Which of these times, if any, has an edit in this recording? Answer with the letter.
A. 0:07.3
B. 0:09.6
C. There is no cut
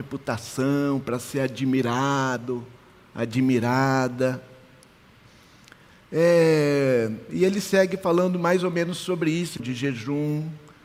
B